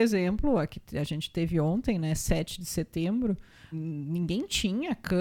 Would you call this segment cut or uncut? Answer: cut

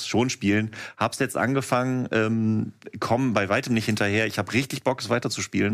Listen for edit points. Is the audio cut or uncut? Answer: uncut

